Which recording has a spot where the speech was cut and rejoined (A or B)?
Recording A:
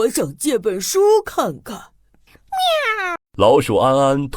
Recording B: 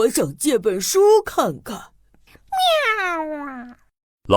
A